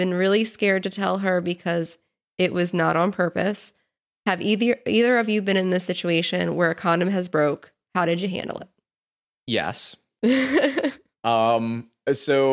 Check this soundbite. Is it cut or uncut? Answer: uncut